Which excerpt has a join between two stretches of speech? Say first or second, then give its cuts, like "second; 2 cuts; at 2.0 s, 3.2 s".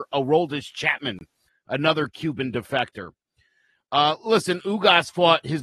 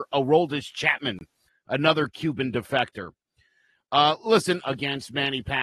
second; 1 cut; at 4.6 s